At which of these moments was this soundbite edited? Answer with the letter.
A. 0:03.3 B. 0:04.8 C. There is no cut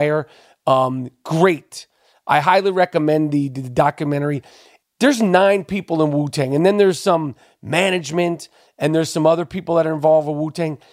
B